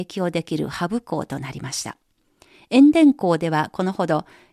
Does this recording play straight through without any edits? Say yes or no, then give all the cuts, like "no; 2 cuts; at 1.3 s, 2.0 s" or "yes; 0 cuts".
yes; 0 cuts